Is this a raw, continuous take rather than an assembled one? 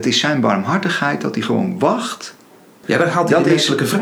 no; 1 cut; at 2.8 s

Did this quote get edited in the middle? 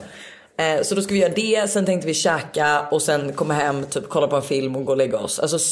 no; 0 cuts

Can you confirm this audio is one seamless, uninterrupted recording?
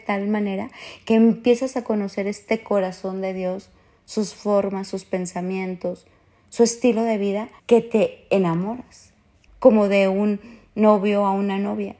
no; 2 cuts; at 7.6 s, 9.5 s

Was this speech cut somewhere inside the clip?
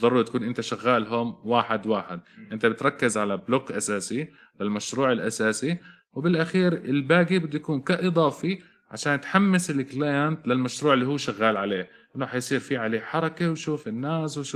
no; 0 cuts

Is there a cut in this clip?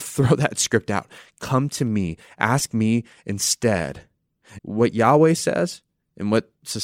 yes; 1 cut; at 4.6 s

